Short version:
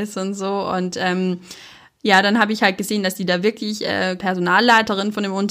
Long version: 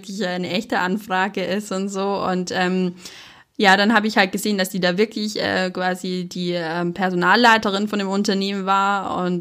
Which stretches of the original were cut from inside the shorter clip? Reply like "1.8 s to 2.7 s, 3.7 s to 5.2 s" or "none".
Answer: 5.7 s to 6.9 s